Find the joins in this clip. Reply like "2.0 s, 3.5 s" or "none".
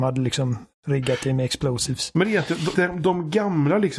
2.7 s

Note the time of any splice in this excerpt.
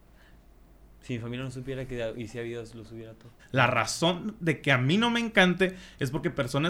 3.4 s

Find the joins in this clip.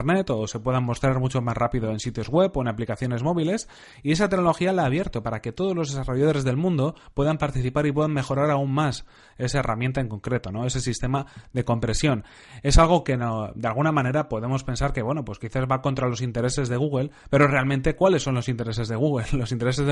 none

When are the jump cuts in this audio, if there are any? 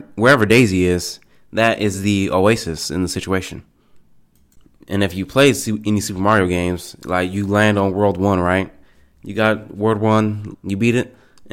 10.5 s

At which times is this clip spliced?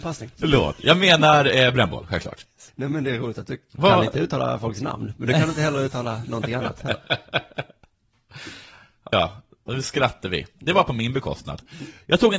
2.7 s, 9.1 s

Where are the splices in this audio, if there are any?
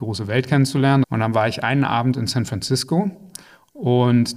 1.0 s

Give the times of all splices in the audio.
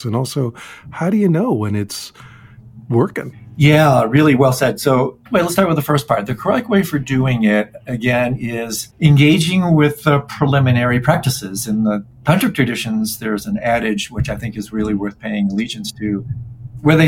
8.9 s

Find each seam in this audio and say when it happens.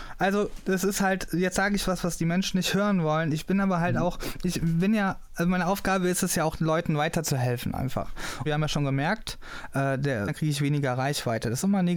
8.5 s, 10.3 s

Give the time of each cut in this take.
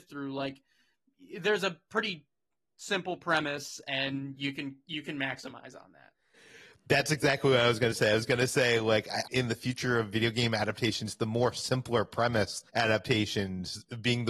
9.3 s, 12.7 s

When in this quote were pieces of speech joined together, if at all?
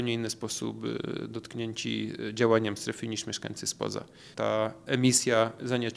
4.3 s

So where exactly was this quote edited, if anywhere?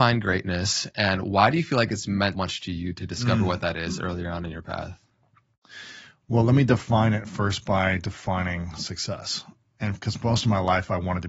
2.3 s

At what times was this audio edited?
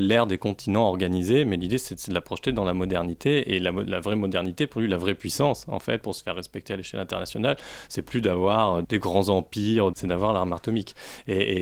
8.8 s, 9.9 s

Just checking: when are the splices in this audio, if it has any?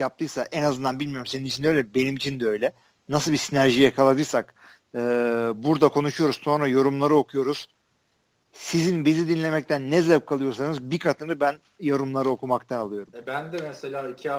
none

